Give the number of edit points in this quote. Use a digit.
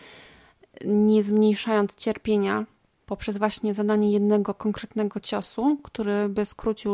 0